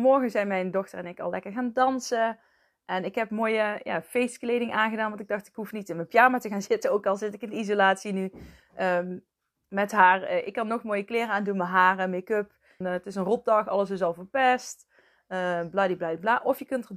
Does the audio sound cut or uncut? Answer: cut